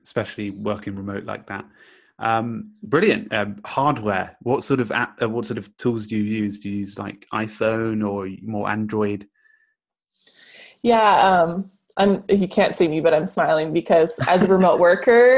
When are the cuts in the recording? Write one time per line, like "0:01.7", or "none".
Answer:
0:03.3